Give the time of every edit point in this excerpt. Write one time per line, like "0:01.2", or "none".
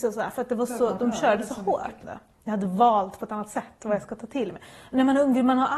0:02.0